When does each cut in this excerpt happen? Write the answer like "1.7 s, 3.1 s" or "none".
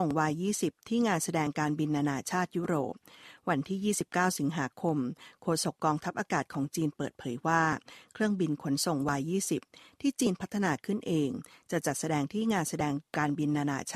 none